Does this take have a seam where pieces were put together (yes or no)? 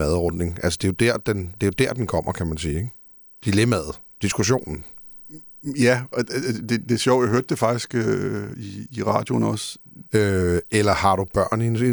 yes